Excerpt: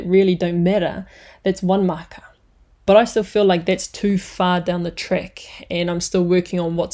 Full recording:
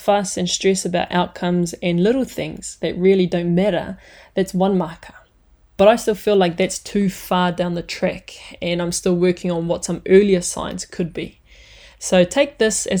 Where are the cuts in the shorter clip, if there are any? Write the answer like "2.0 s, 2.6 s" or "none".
none